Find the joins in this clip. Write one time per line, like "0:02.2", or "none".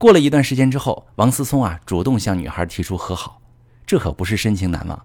none